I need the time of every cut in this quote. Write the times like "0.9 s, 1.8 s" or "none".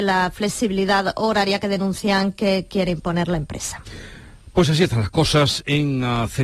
none